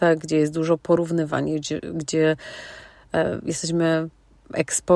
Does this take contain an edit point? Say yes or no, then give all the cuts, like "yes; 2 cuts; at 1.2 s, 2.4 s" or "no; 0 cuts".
no; 0 cuts